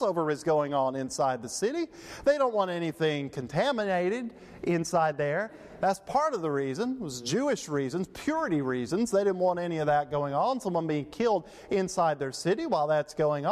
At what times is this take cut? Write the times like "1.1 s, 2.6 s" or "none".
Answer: none